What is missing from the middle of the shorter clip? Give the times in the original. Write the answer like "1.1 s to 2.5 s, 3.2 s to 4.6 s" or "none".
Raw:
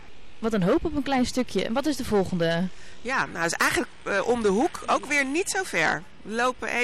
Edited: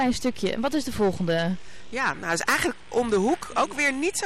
4.0 s to 4.2 s